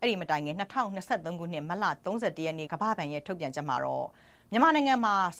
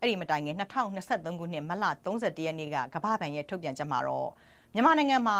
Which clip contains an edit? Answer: first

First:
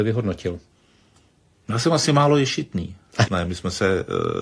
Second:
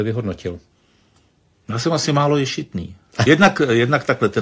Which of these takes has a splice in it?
first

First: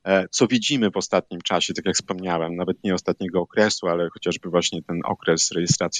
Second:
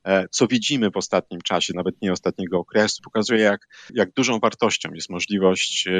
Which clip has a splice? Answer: second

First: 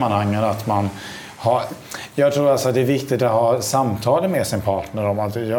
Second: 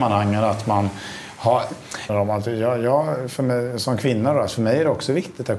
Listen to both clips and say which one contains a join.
second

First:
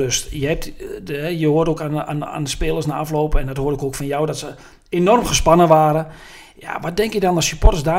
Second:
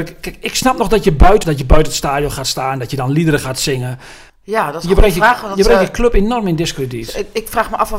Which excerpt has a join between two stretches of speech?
second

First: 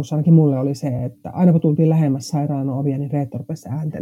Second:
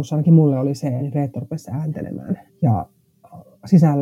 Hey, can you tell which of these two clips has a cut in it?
second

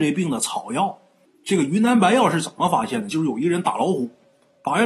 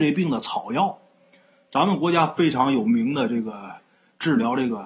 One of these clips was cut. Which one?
first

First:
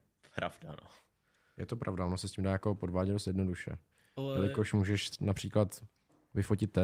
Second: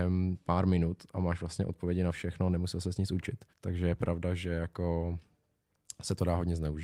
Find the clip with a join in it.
second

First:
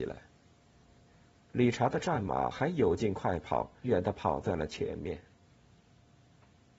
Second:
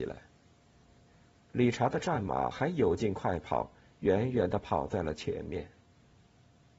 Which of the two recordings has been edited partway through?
first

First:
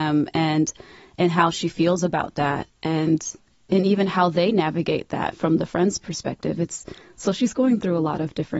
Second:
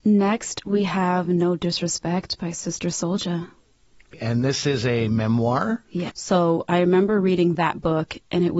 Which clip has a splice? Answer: second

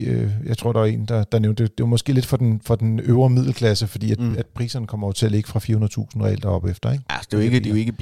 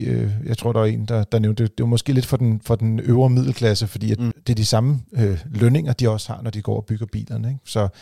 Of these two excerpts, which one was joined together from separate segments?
second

